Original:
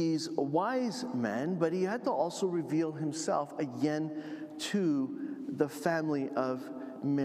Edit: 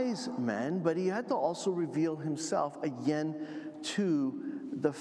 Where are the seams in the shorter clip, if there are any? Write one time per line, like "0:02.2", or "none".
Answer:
none